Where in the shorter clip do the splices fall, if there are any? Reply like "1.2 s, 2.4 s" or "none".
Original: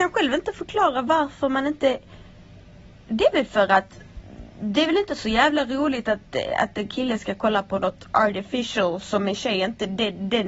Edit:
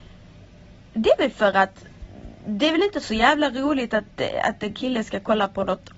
none